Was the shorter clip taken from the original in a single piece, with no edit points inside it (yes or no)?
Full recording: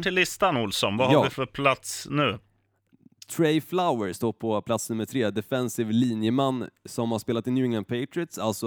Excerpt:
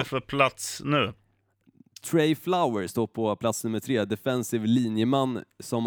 yes